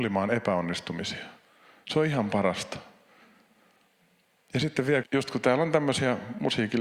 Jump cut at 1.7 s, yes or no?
no